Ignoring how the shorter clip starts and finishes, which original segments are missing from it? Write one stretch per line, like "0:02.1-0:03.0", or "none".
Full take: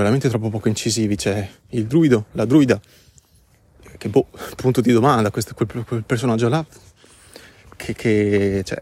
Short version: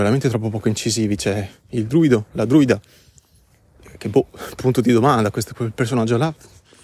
0:05.5-0:05.9